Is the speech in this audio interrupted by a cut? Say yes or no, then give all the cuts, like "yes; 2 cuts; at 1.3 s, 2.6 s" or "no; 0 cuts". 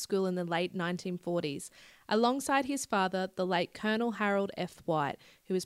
no; 0 cuts